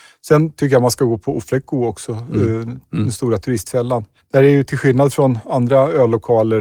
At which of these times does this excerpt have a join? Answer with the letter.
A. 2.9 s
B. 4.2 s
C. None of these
B